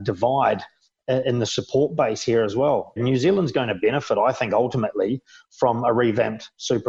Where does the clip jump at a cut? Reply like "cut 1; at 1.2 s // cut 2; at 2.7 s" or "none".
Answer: cut 1; at 3.0 s